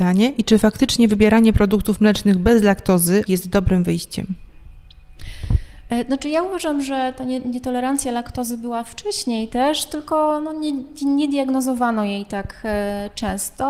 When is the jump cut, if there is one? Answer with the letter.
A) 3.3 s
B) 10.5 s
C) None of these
A